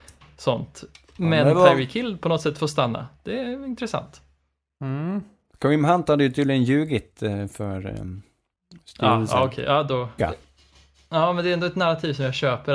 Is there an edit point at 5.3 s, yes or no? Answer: no